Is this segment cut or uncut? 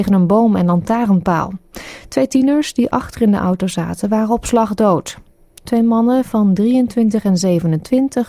uncut